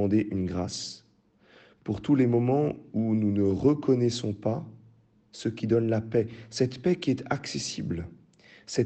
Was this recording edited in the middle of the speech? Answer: no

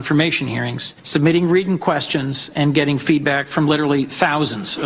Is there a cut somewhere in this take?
no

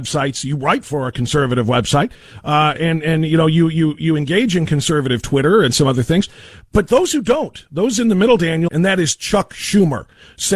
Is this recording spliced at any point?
yes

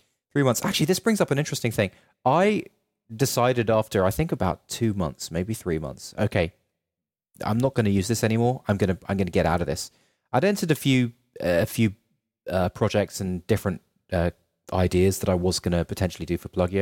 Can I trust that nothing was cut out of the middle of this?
yes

